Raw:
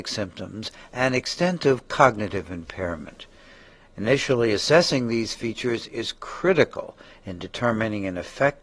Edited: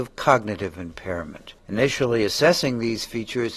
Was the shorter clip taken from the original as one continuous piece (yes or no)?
no